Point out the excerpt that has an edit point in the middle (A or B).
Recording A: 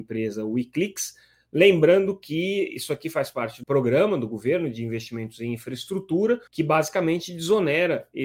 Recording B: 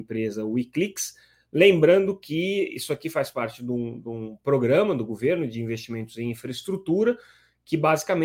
A